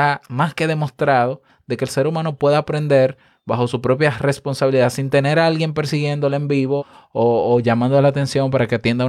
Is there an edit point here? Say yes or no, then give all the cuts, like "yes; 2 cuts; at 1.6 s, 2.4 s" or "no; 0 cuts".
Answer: yes; 1 cut; at 6.8 s